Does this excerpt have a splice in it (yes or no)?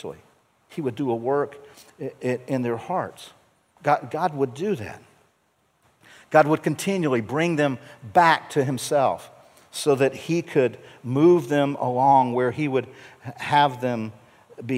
yes